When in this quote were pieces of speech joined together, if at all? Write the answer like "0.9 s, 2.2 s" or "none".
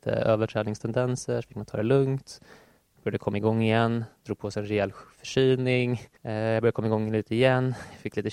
none

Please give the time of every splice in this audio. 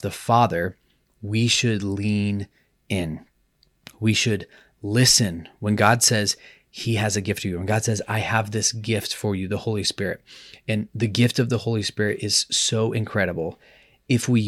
none

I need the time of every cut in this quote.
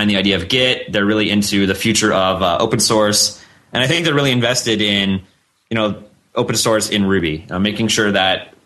none

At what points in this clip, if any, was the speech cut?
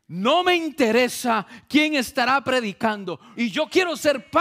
3.3 s

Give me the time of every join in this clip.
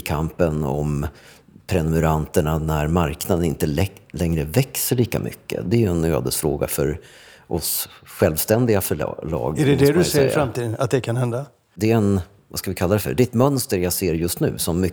none

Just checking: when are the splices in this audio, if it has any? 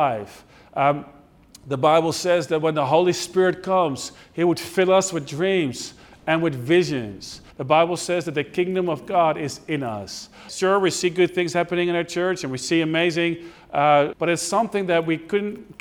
7.5 s, 10.5 s, 14.1 s

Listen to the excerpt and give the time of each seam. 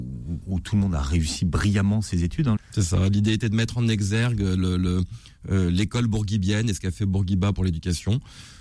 2.6 s

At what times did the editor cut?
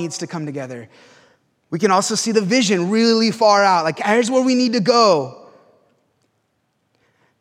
none

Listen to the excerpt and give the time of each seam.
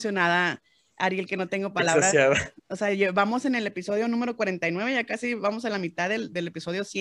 2.6 s

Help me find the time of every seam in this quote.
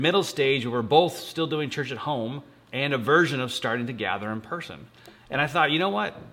none

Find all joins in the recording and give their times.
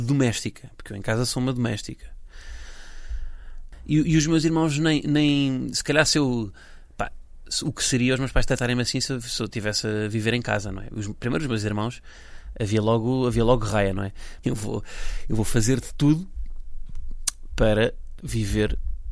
14.4 s, 18.2 s

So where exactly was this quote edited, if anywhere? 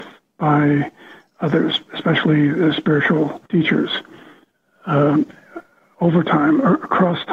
3.5 s

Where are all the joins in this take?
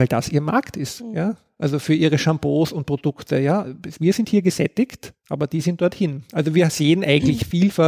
none

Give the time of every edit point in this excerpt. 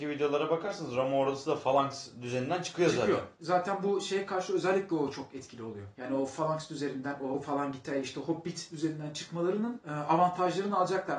none

